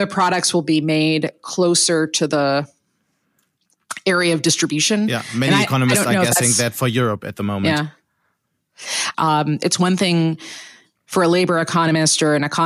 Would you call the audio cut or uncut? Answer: cut